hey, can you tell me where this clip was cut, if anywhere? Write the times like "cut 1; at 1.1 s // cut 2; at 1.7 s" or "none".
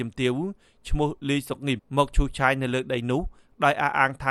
cut 1; at 1.8 s